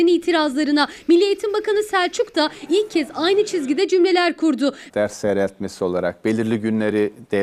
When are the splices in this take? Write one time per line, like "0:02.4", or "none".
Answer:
0:04.9